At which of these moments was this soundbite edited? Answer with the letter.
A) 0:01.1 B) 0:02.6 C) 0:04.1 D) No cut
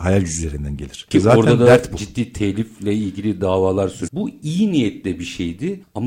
C